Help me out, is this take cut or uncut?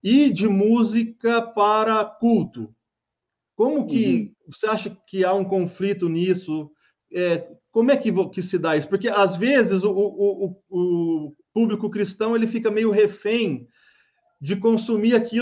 uncut